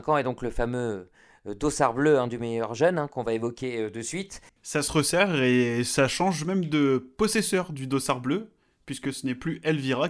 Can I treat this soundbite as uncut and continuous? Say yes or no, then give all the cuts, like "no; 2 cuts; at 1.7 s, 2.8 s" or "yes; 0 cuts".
no; 1 cut; at 4.5 s